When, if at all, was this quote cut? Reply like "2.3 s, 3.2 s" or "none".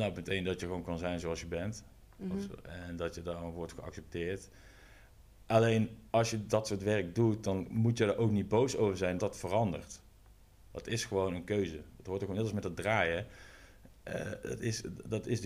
9.2 s